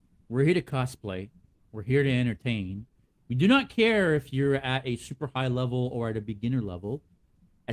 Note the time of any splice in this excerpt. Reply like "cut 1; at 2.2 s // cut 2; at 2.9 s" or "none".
cut 1; at 3.2 s